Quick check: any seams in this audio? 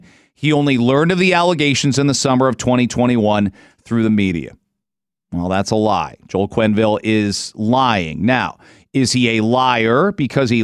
no; 0 cuts

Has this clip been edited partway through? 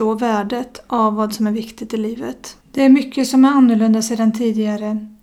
yes; 1 cut; at 2.6 s

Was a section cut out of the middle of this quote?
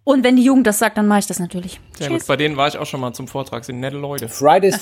no; 0 cuts

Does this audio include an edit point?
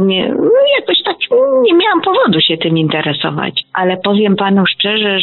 no; 0 cuts

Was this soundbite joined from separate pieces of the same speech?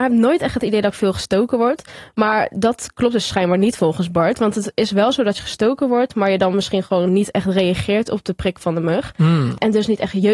no; 0 cuts

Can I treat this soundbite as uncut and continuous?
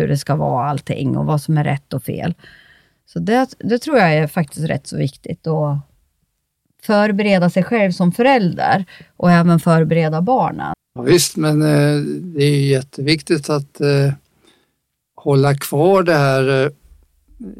no; 1 cut; at 10.7 s

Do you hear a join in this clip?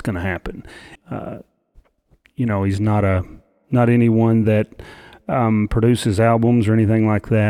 yes; 1 cut; at 1.0 s

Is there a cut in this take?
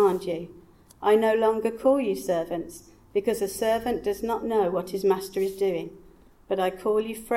no; 0 cuts

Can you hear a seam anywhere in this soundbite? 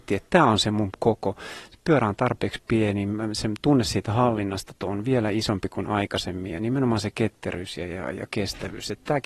no; 0 cuts

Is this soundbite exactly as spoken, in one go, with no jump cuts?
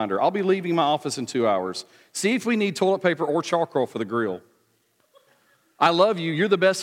yes; 0 cuts

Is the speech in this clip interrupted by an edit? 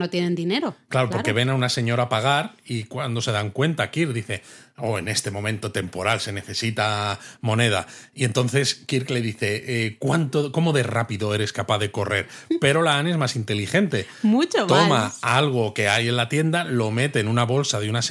no; 0 cuts

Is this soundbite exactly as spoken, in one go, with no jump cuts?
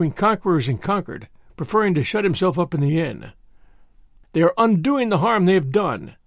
no; 2 cuts; at 1.5 s, 4.3 s

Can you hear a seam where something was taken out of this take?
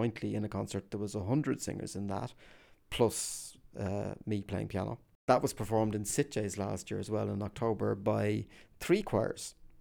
no; 0 cuts

